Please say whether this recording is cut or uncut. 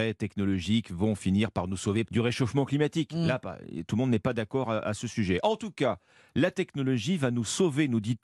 cut